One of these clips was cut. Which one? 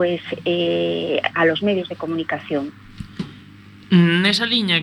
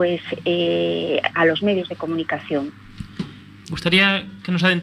second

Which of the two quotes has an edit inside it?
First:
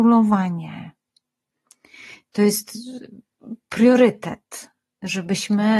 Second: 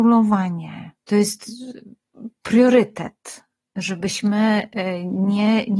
second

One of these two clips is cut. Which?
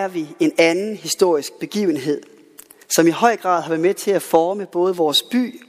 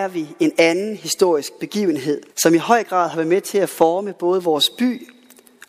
second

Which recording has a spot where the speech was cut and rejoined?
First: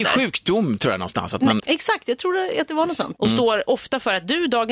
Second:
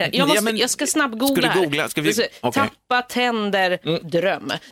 first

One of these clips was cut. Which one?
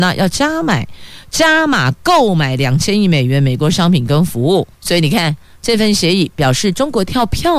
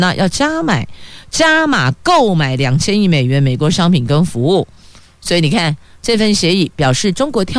first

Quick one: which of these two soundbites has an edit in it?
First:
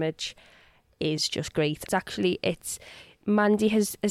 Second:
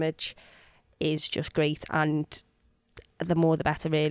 first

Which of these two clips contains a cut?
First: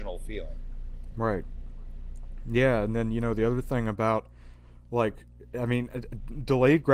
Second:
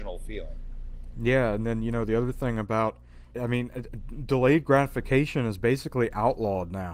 second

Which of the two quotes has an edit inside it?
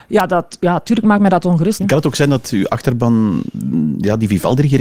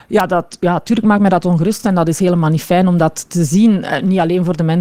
first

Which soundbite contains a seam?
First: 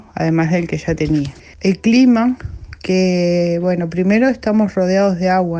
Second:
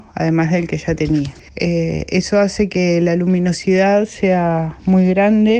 second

